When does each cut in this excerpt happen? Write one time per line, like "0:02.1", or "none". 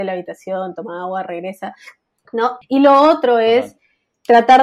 0:02.6